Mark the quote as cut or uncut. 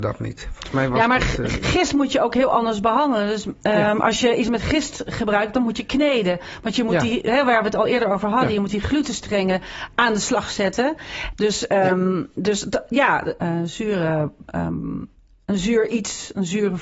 cut